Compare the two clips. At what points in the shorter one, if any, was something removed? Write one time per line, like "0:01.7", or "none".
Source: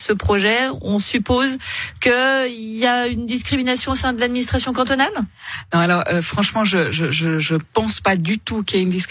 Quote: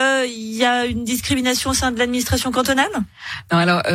none

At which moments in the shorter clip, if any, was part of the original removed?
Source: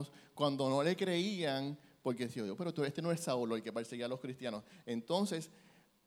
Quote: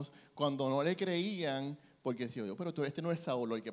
none

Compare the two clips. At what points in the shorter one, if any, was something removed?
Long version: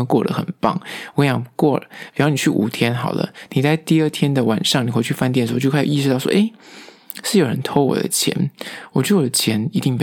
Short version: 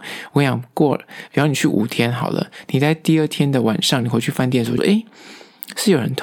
0:04.8

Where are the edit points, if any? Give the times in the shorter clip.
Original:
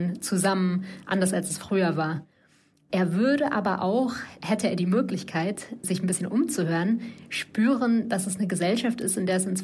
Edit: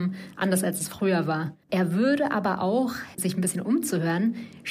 0:01.6
0:03.1

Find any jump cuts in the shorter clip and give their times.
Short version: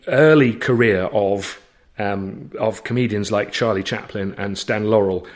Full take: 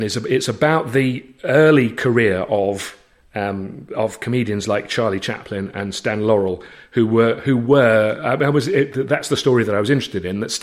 none

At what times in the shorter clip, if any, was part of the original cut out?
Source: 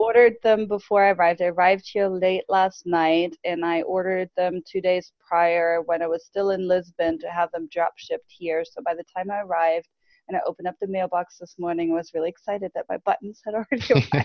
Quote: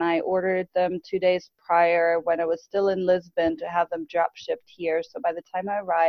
none

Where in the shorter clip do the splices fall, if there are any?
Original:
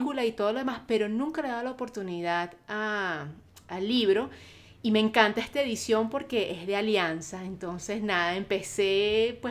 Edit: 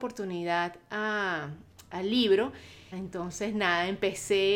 0:02.9

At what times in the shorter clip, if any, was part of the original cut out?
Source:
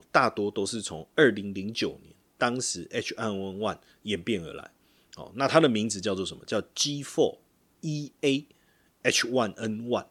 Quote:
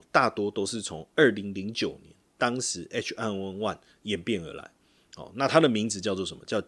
none

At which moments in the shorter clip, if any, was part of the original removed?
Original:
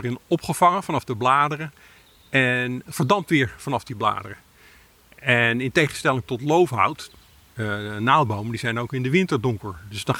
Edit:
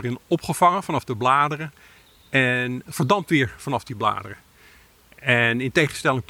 none

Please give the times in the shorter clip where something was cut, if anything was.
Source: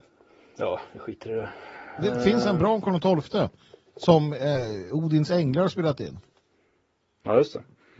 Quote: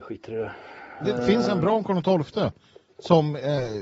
none

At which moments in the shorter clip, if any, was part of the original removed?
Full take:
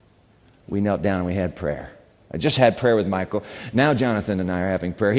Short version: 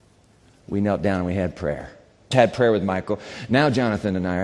0:02.3

